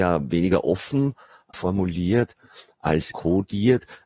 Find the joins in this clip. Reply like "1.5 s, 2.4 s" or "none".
1.5 s, 3.1 s